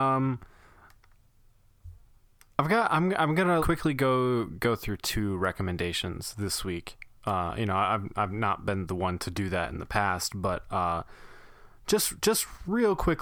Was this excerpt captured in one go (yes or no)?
no